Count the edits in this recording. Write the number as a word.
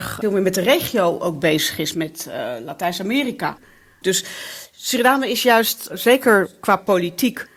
one